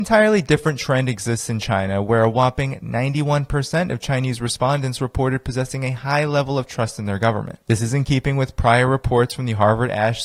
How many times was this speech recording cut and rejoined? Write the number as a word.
one